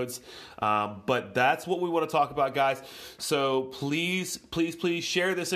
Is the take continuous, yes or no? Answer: yes